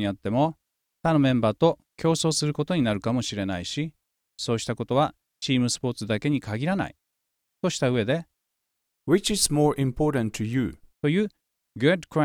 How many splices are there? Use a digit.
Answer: 1